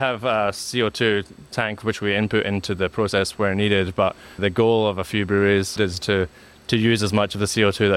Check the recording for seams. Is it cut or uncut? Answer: cut